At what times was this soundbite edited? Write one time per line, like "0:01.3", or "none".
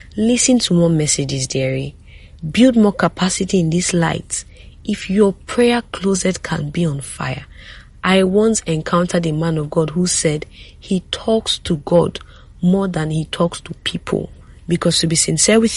0:02.4
0:14.6

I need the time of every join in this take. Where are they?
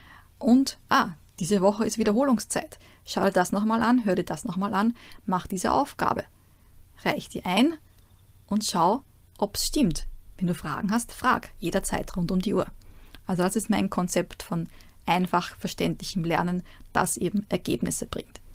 none

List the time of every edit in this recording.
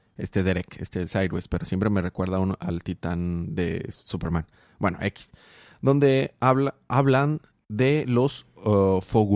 none

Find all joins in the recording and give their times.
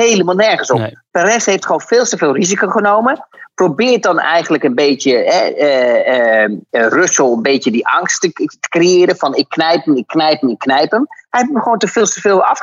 none

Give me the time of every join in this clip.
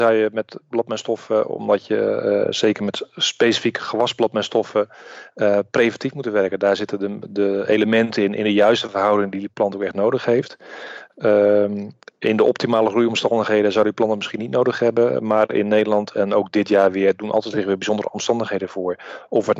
none

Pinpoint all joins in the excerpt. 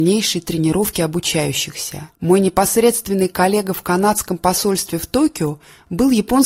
0:02.1

